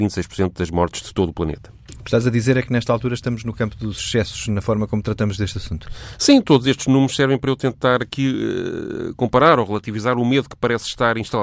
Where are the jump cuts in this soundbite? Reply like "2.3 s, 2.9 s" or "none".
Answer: none

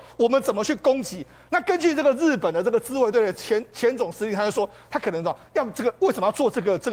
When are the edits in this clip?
none

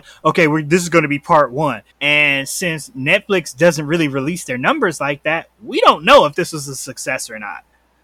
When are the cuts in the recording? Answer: 1.9 s

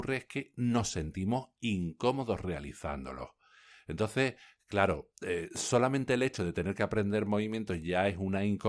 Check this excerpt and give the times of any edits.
none

